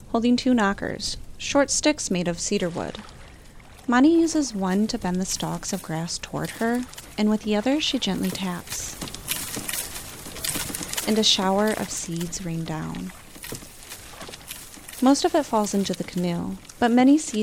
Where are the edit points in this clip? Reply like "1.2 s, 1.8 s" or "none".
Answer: none